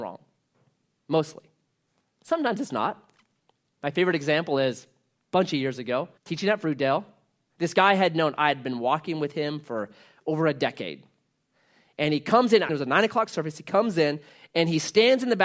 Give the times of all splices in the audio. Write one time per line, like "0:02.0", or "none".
0:06.2
0:12.7